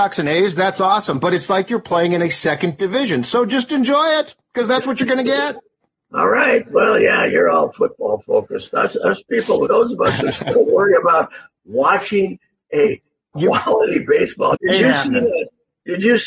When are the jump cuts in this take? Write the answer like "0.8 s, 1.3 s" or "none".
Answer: 9.7 s, 14.5 s